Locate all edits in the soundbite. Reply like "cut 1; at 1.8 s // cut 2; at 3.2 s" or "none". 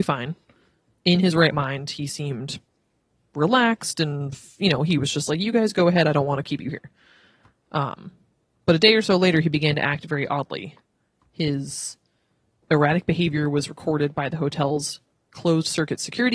none